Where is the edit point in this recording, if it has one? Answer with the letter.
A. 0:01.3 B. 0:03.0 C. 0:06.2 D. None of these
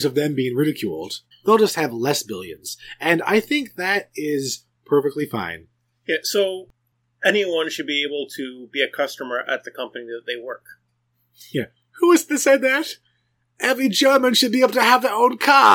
A